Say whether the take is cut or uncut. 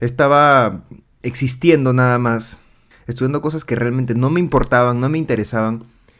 cut